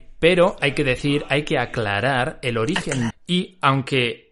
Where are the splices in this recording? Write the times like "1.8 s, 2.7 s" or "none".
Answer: 3.1 s